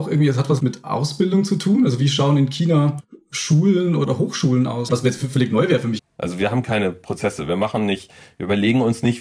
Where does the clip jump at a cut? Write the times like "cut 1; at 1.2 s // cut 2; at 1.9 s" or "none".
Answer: cut 1; at 4.9 s // cut 2; at 6.0 s

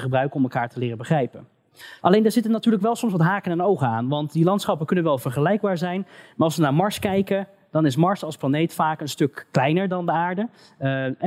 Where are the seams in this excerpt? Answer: cut 1; at 2.0 s

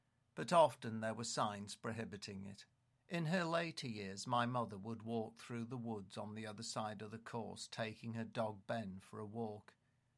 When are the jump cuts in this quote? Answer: cut 1; at 3.0 s

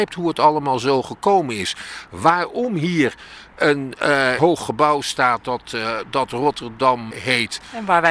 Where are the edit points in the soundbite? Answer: cut 1; at 4.4 s // cut 2; at 7.1 s

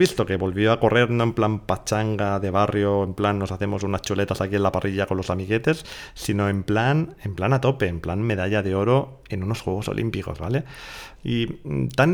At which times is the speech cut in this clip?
cut 1; at 11.2 s

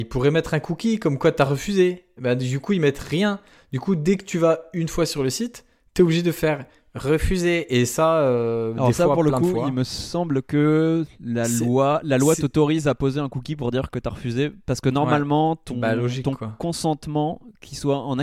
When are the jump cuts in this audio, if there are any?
none

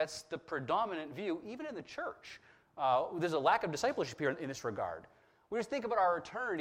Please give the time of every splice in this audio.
none

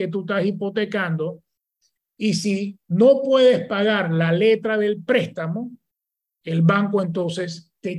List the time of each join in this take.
none

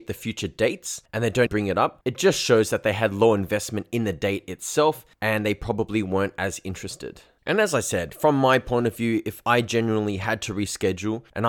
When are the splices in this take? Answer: cut 1; at 1.5 s

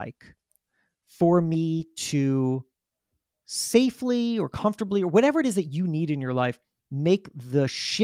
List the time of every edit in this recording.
none

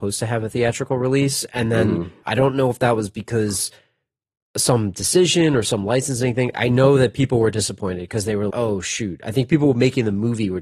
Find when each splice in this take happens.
cut 1; at 2.2 s // cut 2; at 6.5 s // cut 3; at 8.5 s

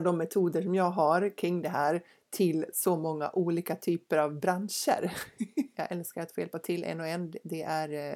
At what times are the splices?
cut 1; at 5.7 s

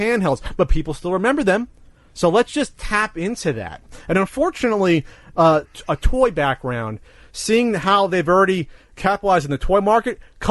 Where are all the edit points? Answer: cut 1; at 5.6 s

